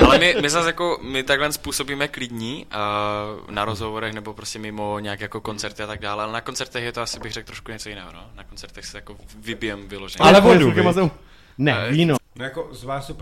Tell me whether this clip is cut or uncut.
cut